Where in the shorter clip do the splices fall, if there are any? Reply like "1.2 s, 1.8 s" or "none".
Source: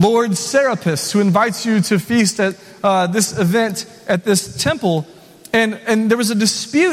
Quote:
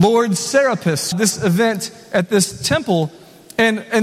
1.1 s